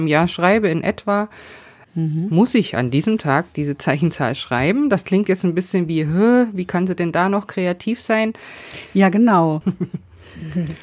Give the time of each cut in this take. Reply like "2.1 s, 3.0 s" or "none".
9.6 s